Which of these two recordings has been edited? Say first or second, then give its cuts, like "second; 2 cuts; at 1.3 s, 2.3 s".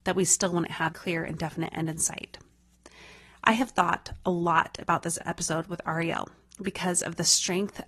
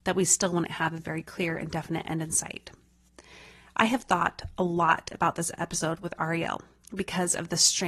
first; 1 cut; at 0.9 s